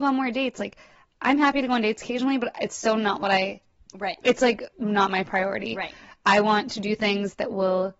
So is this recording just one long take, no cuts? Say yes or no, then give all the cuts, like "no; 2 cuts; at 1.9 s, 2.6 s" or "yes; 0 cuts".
yes; 0 cuts